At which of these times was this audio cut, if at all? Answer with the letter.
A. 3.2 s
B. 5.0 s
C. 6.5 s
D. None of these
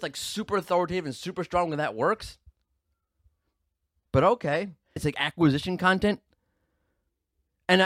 B